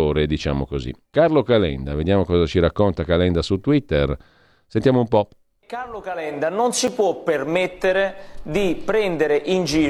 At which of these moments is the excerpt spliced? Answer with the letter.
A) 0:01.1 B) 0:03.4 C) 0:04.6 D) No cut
A